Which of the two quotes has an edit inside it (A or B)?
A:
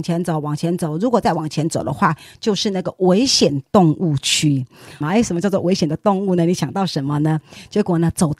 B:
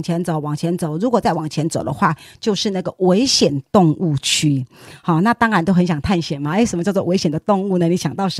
A